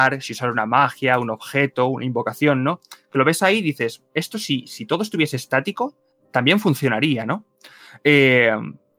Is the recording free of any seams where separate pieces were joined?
yes; 0 cuts

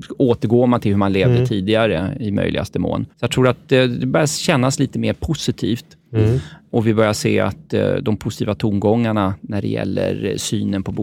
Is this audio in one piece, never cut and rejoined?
no; 2 cuts; at 3.1 s, 6.1 s

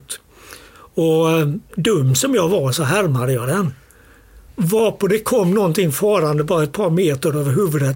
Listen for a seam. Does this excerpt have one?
yes; 1 cut; at 4.5 s

